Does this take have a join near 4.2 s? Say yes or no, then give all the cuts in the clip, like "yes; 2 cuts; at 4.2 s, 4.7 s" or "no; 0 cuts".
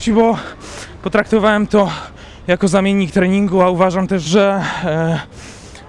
yes; 1 cut; at 4.2 s